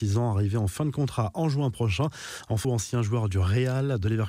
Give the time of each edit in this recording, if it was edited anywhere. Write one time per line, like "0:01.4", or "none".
0:02.6